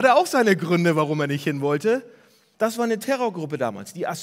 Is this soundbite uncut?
no; 1 cut; at 2.5 s

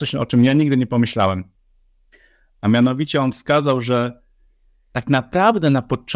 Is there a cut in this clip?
no; 0 cuts

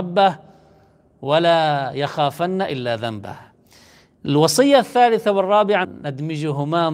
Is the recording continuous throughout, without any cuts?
no; 1 cut; at 5.8 s

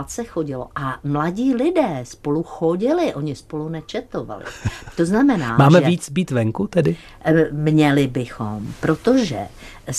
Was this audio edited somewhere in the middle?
no; 0 cuts

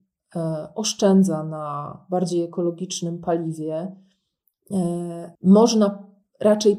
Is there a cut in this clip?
yes; 1 cut; at 5.3 s

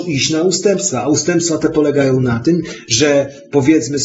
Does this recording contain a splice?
no; 0 cuts

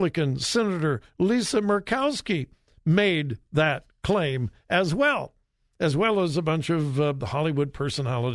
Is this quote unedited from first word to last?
yes; 0 cuts

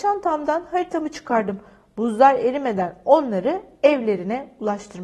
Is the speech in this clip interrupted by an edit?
no; 0 cuts

